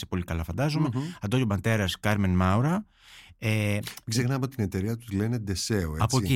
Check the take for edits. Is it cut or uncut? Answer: uncut